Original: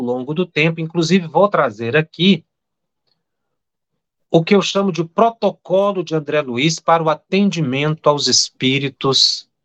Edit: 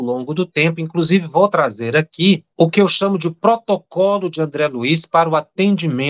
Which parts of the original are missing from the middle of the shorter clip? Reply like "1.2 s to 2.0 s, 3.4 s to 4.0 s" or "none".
2.5 s to 4.2 s